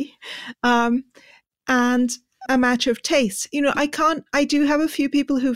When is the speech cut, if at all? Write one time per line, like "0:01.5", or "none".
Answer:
0:02.4